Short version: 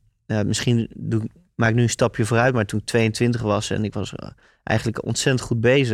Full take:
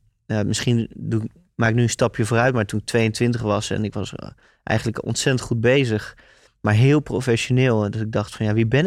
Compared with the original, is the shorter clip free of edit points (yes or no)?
yes